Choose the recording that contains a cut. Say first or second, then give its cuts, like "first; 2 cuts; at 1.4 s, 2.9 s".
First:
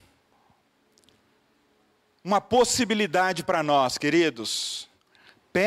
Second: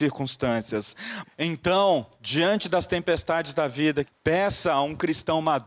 second; 2 cuts; at 1.2 s, 4.0 s